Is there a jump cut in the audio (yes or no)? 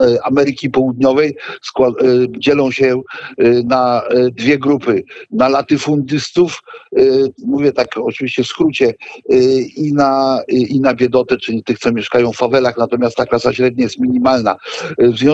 no